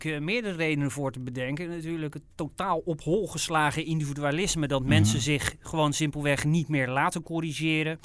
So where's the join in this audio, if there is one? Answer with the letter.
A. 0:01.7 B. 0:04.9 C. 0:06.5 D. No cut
D